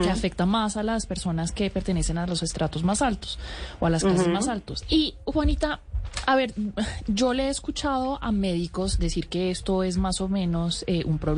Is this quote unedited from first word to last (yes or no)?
no